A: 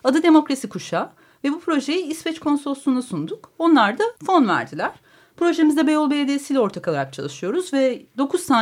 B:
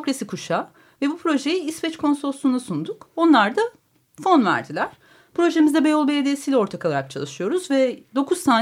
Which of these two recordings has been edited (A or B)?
A